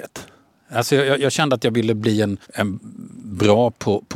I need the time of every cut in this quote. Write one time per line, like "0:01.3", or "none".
0:02.4